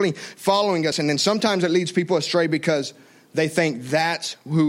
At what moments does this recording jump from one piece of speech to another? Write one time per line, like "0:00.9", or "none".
none